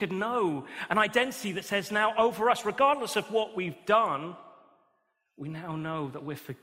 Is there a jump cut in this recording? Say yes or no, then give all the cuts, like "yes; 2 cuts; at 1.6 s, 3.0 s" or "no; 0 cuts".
no; 0 cuts